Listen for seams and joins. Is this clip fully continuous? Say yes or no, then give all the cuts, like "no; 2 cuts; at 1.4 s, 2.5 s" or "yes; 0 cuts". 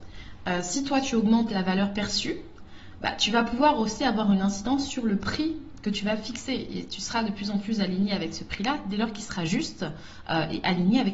yes; 0 cuts